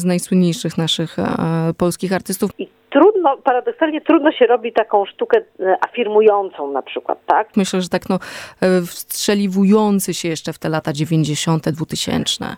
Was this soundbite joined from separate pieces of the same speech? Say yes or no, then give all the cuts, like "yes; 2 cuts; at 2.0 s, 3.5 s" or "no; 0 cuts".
yes; 2 cuts; at 2.5 s, 7.5 s